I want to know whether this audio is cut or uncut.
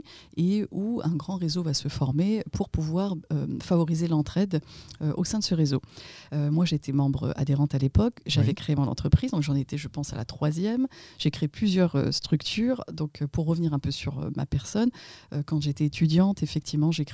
uncut